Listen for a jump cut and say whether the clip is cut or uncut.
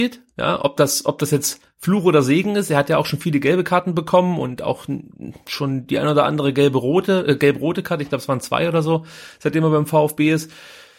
uncut